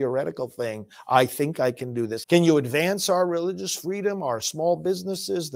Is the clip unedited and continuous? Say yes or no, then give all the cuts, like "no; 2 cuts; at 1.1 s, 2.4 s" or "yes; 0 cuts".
no; 1 cut; at 2.2 s